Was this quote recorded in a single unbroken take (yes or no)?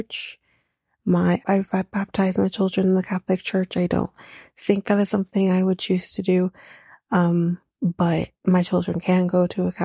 no